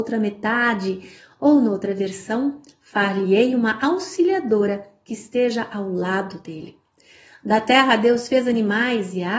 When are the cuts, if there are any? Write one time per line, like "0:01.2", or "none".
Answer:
none